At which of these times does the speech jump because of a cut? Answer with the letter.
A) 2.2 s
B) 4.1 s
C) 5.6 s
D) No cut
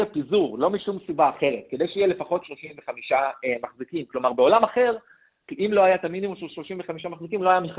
D